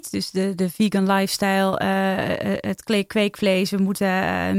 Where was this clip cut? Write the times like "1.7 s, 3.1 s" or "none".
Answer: none